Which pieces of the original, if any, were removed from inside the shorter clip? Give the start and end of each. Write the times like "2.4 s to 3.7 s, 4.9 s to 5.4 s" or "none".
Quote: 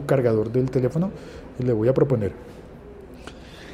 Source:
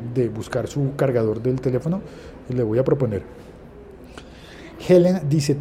none